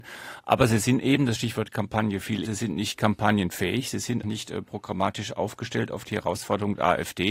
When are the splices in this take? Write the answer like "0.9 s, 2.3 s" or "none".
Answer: 2.4 s, 4.2 s